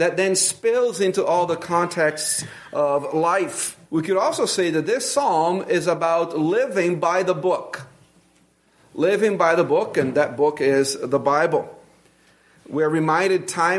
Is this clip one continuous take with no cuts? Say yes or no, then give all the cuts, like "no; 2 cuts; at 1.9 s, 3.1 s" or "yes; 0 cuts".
no; 1 cut; at 3.8 s